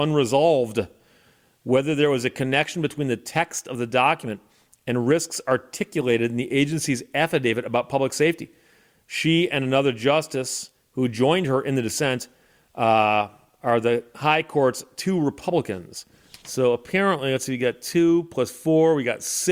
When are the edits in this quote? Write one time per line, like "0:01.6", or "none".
none